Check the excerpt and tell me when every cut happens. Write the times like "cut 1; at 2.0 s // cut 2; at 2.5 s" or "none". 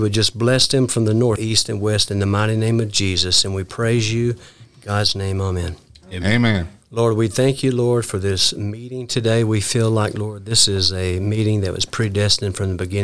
cut 1; at 1.4 s // cut 2; at 6.8 s